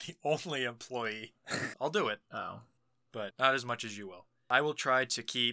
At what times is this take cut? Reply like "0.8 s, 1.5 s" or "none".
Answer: 1.7 s